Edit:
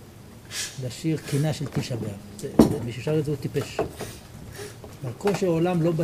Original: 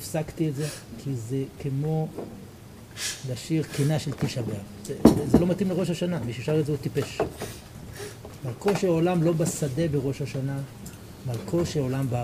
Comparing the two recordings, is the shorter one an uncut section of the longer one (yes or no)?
no